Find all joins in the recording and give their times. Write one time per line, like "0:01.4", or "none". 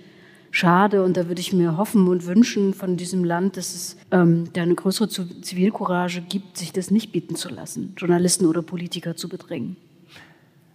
0:04.0